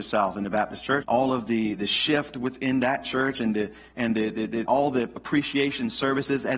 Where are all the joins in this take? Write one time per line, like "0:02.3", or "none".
0:01.0
0:04.7